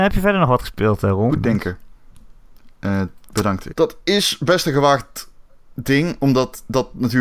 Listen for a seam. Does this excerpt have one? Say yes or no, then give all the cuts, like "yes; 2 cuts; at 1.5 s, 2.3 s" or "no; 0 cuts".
yes; 2 cuts; at 1.3 s, 3.7 s